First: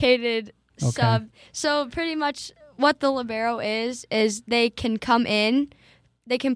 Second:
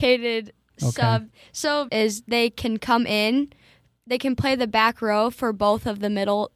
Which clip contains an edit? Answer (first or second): second